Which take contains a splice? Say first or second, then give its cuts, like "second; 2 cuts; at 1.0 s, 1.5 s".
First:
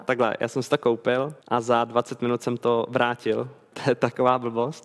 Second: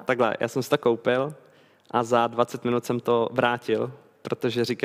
first; 2 cuts; at 1.4 s, 3.7 s